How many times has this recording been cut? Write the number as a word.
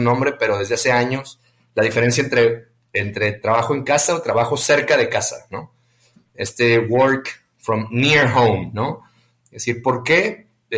zero